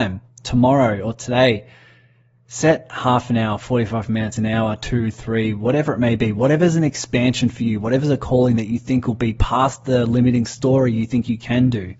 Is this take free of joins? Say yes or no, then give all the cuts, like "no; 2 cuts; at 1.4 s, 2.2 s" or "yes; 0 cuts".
yes; 0 cuts